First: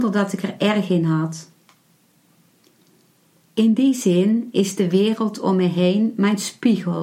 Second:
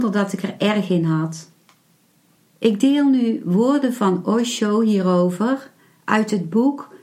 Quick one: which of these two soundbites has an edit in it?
second; 1 cut; at 2.4 s

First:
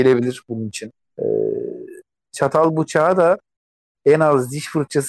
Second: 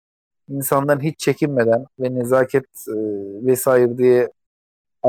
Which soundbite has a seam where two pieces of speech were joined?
first; 1 cut; at 1.1 s

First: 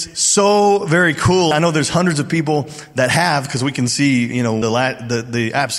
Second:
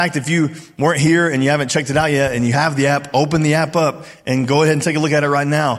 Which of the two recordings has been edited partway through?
first; 2 cuts; at 1.5 s, 4.6 s

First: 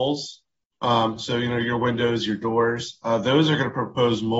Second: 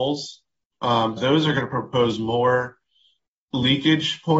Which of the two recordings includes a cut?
second; 1 cut; at 1.2 s

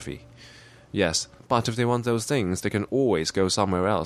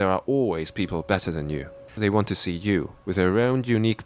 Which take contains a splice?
first; 1 cut; at 1.4 s

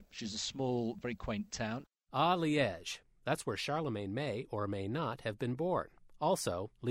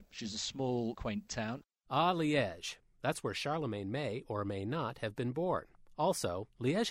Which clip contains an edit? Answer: second; 1 cut; at 0.9 s

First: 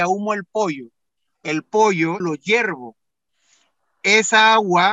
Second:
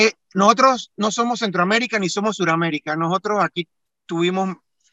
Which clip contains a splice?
first; 1 cut; at 2.2 s

